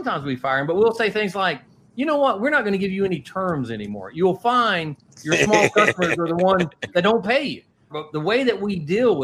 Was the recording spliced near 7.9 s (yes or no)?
yes